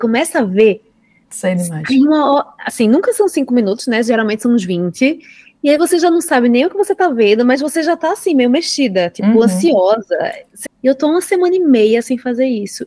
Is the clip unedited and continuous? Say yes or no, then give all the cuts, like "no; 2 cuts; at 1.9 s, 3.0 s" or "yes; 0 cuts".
no; 1 cut; at 10.7 s